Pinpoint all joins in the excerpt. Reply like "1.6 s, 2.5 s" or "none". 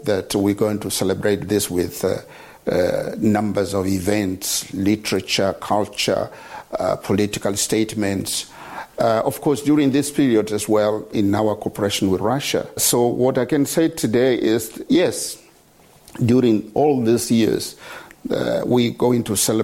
11.1 s, 12.8 s